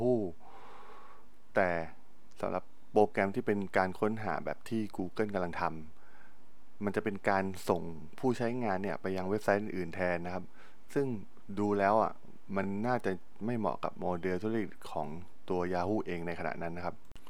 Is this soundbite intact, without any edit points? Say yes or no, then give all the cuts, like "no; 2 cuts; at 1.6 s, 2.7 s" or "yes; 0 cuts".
yes; 0 cuts